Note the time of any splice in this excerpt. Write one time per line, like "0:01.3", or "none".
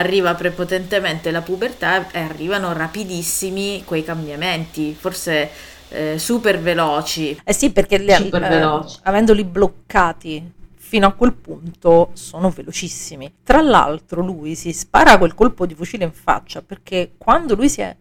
0:13.4